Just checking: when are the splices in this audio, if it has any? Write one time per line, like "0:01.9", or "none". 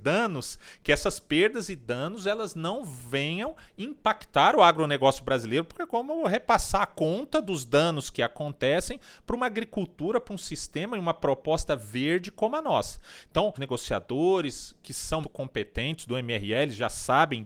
0:13.6
0:15.2